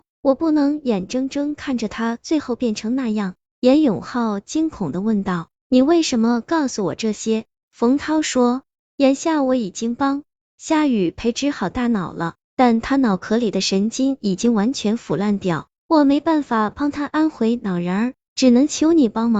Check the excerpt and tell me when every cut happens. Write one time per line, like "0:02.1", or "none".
none